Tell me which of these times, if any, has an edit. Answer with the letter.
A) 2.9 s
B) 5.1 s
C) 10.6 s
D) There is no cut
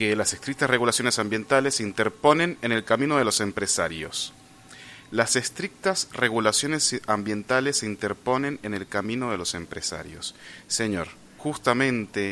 D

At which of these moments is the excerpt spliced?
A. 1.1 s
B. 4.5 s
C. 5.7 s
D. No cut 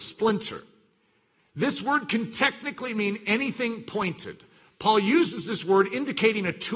D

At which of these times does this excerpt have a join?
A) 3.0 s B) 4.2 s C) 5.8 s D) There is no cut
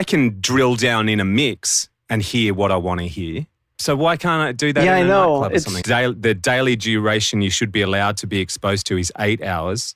C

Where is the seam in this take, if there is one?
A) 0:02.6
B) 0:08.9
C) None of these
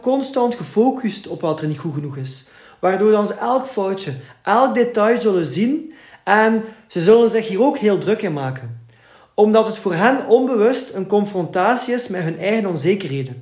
C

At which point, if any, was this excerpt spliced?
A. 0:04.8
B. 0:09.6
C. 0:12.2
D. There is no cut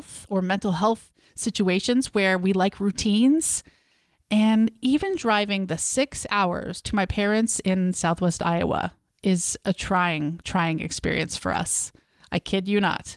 D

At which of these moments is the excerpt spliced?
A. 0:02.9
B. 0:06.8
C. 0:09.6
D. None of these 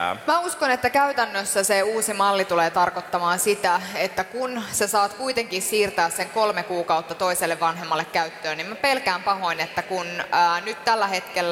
C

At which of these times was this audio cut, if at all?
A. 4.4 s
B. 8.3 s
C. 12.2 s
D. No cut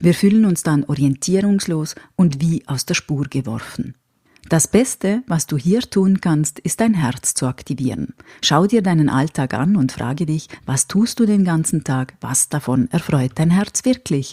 D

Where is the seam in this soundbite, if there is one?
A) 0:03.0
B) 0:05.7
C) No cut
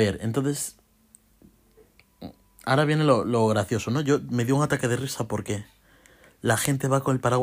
C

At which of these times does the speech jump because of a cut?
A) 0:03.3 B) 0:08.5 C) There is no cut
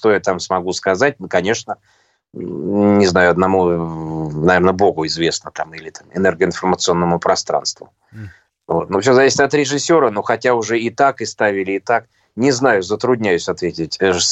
C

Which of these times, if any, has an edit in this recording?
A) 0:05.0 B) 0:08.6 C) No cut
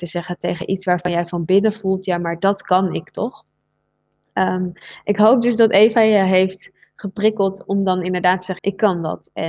B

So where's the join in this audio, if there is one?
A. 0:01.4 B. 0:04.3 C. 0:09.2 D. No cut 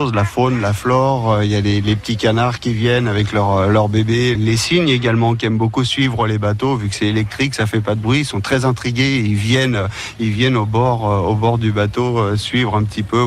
B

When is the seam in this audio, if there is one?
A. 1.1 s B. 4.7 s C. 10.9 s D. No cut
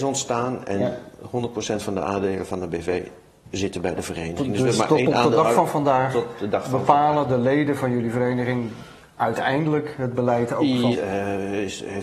C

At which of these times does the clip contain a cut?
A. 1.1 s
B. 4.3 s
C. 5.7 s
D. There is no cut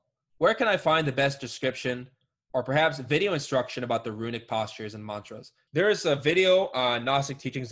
C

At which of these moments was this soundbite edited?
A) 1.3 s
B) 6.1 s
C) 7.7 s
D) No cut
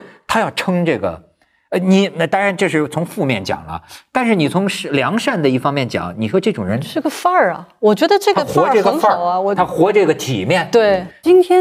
D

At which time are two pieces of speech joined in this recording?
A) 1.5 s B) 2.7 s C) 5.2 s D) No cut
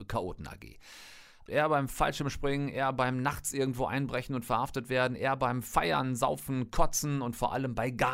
A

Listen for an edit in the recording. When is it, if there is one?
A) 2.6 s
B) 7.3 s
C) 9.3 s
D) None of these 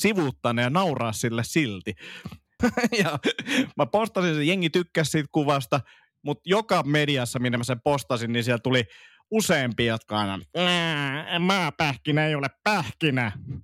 A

